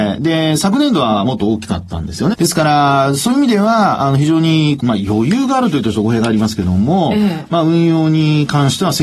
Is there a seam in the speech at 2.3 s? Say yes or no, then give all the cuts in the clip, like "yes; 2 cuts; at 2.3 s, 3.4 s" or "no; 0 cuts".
yes; 2 cuts; at 2.3 s, 4.8 s